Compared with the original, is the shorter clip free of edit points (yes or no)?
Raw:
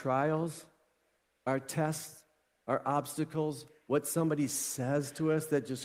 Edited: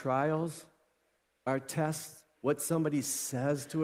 no